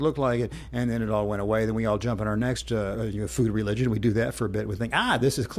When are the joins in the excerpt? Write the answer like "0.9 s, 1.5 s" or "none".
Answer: 2.9 s